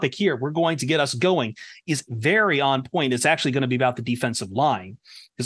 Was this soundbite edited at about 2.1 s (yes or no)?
yes